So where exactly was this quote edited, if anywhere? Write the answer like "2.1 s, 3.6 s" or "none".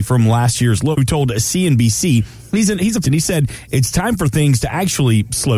0.9 s, 3.0 s